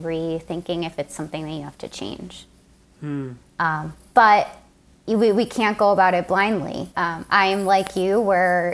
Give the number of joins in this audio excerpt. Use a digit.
2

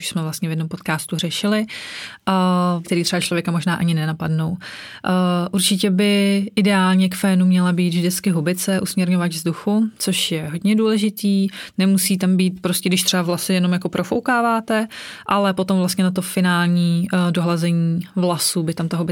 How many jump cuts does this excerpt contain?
1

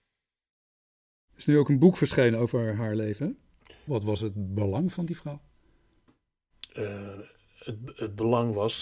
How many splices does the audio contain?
1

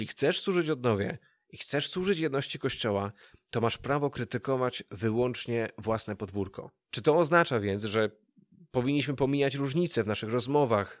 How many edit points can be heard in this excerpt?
1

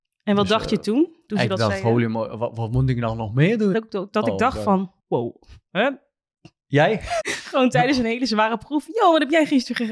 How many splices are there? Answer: 3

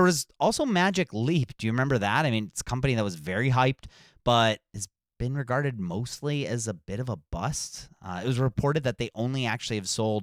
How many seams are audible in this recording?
0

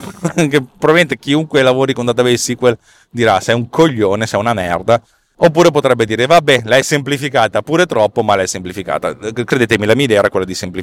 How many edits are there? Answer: 0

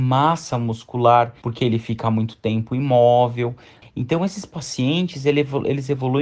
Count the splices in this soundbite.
1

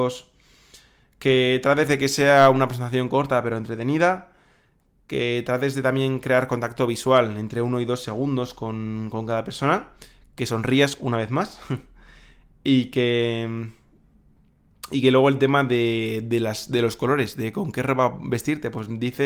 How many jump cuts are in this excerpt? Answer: 0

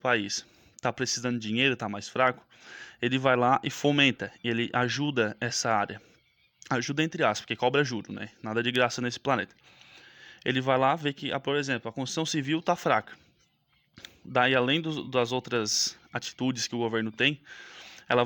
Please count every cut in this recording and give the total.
0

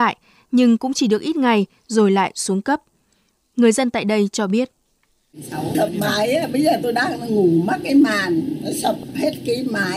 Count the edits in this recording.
0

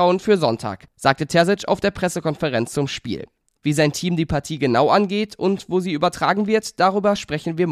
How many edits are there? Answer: 0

